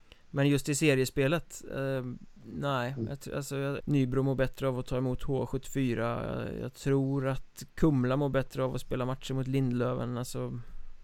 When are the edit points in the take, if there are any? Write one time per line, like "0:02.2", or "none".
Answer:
0:02.4
0:03.8